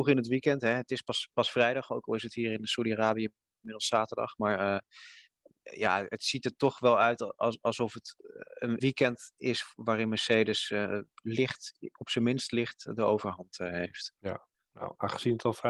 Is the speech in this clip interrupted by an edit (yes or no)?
yes